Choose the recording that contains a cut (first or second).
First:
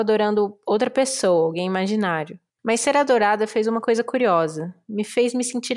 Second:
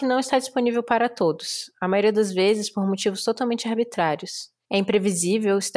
first